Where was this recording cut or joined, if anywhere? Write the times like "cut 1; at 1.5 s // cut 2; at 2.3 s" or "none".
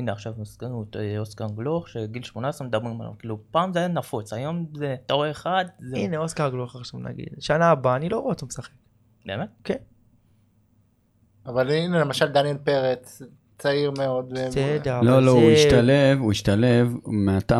cut 1; at 11.5 s